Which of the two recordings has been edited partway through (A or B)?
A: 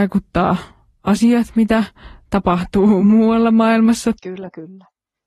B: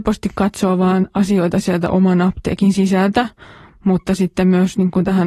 A